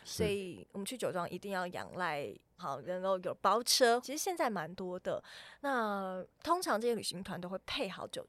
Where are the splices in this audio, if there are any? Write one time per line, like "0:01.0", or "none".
0:02.6
0:04.0